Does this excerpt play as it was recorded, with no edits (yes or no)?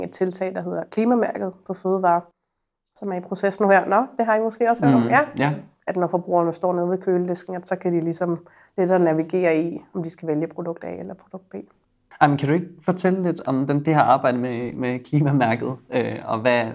no